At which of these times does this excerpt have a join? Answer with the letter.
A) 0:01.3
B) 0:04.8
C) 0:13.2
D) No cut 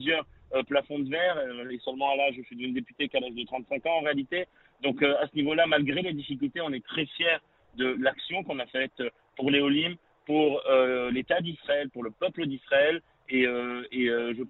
D